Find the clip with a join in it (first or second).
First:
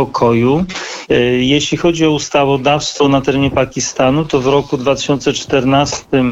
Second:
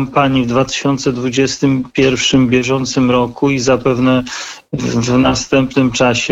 first